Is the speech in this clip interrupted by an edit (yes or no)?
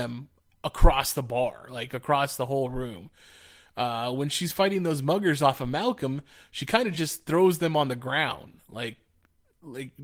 no